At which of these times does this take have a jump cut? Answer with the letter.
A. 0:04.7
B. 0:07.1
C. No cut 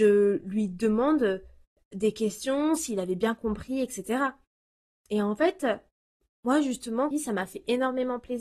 B